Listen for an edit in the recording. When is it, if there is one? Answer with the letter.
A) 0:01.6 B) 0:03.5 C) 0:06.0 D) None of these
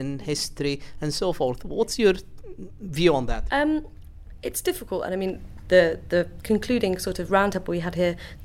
B